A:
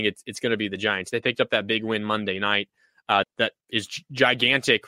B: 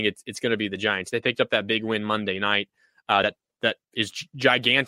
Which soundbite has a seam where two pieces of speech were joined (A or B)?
A